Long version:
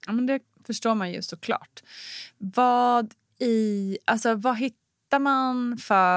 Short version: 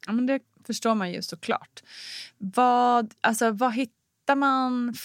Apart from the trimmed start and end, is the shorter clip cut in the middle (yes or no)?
yes